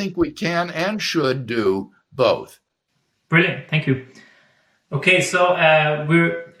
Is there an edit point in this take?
no; 0 cuts

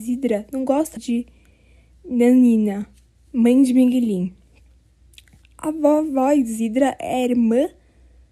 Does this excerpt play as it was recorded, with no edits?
no; 1 cut; at 1.0 s

